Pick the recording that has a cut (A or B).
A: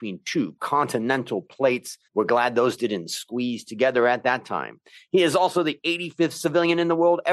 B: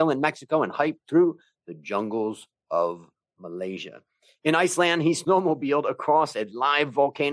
A